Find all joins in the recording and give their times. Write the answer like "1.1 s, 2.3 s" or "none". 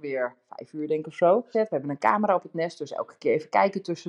1.5 s